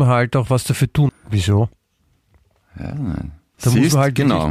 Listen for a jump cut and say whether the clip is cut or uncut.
cut